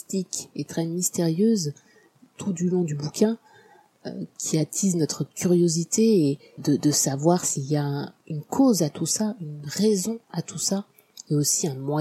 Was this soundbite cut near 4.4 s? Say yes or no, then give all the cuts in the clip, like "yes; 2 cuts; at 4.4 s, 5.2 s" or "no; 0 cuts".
yes; 2 cuts; at 4.4 s, 6.6 s